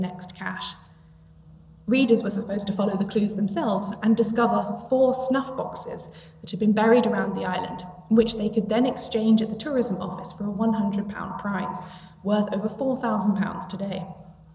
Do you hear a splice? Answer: no; 0 cuts

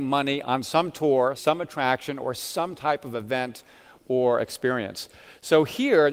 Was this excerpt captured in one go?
no; 1 cut; at 1.4 s

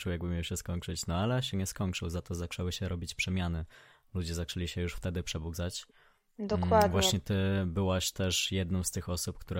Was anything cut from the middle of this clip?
no; 0 cuts

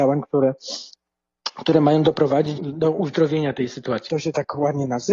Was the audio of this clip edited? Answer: yes; 2 cuts; at 2.6 s, 4.1 s

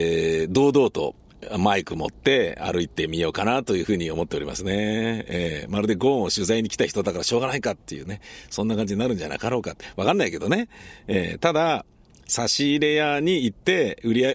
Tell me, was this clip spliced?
no; 0 cuts

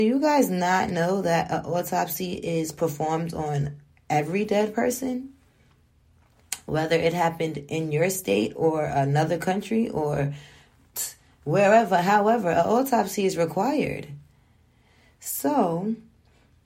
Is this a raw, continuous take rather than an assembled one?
yes; 0 cuts

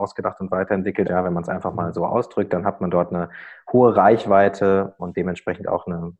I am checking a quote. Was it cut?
yes; 2 cuts; at 1.0 s, 5.0 s

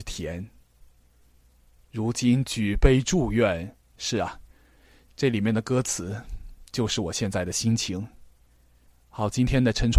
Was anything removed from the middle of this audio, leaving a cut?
yes; 1 cut; at 3.9 s

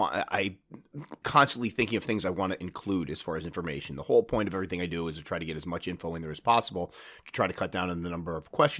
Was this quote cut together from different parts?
no; 0 cuts

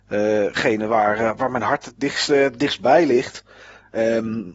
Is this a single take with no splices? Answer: yes; 0 cuts

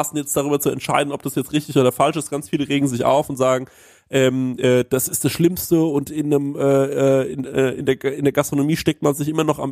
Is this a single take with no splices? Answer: yes; 0 cuts

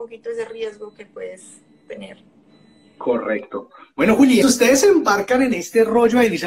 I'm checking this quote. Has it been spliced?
yes; 1 cut; at 4.4 s

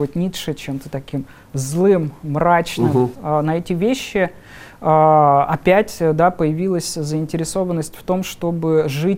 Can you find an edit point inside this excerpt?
yes; 1 cut; at 3.1 s

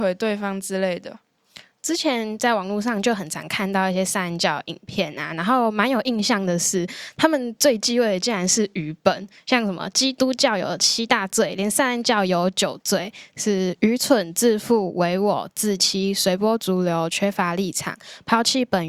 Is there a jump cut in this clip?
no; 0 cuts

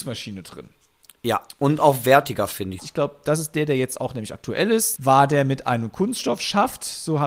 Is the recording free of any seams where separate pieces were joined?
no; 2 cuts; at 2.8 s, 5.0 s

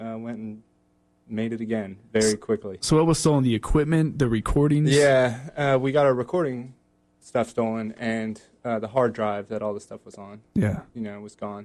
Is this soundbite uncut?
yes; 0 cuts

